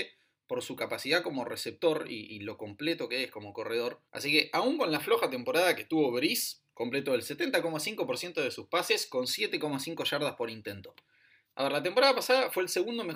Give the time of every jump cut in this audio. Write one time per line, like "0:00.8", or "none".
0:04.1
0:11.4